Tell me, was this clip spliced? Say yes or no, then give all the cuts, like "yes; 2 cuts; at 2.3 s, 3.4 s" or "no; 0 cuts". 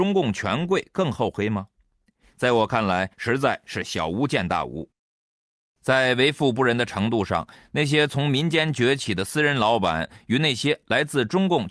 yes; 1 cut; at 3.1 s